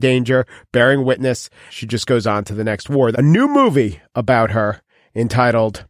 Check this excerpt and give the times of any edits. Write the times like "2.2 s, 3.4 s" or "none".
1.7 s, 3.1 s